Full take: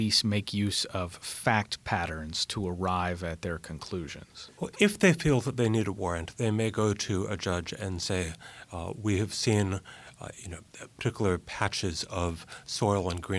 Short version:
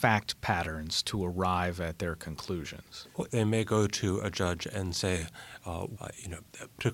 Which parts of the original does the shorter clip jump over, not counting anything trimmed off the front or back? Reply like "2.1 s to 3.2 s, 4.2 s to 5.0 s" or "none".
4.7 s to 6.3 s, 9.0 s to 10.2 s